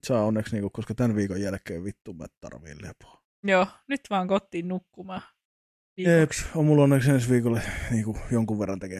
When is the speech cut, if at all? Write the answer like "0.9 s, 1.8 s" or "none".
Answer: none